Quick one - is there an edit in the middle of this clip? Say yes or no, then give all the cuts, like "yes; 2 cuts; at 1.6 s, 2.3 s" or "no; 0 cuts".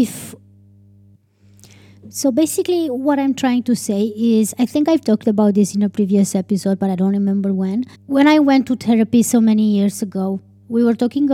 yes; 1 cut; at 7.9 s